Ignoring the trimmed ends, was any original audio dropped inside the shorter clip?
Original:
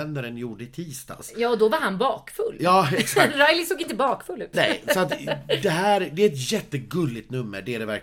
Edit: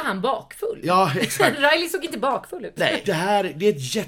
yes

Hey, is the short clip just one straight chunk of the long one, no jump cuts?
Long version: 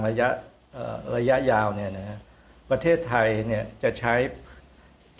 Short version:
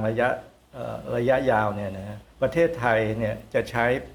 no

